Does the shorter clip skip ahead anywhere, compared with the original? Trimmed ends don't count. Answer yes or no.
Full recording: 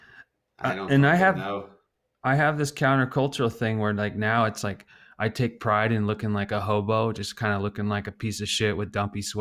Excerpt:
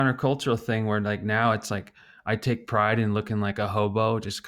no